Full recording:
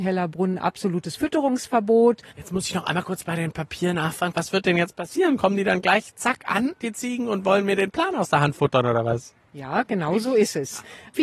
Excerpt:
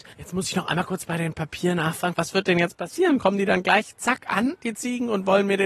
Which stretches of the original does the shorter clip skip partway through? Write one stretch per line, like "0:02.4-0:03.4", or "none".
none

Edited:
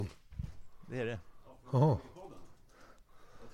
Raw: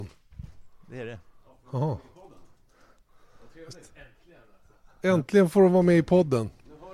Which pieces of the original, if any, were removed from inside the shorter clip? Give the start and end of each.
none

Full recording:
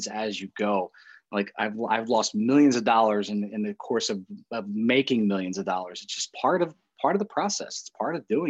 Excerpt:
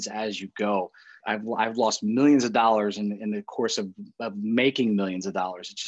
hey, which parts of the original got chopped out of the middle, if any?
0:01.2-0:01.5

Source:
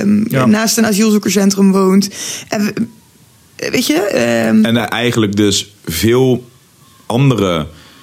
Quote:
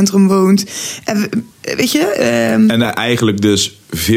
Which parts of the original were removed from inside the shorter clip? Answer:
0:03.0-0:03.5

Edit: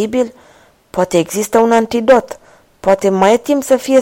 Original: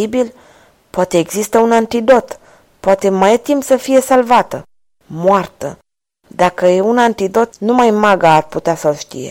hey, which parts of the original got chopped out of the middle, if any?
none

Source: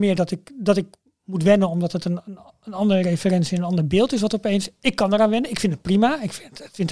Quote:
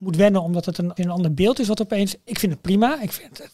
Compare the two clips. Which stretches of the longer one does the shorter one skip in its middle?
0:02.2-0:03.5
0:04.8-0:05.5

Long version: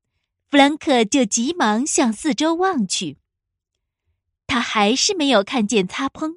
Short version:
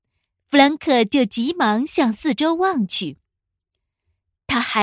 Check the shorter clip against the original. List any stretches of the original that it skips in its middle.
none

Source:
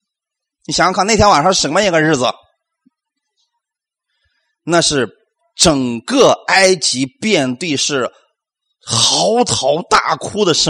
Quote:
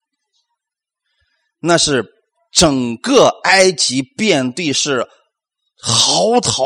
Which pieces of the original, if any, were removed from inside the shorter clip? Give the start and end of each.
none

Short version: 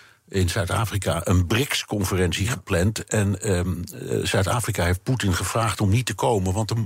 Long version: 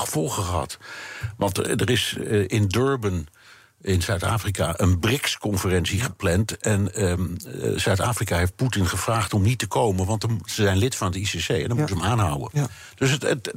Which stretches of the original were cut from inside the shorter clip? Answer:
none

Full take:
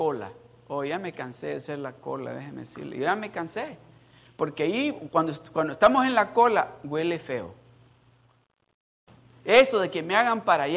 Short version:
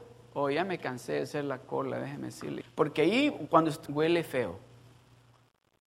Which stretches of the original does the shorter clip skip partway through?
0:02.9-0:04.2
0:05.5-0:06.8

